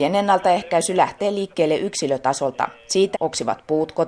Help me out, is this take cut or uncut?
cut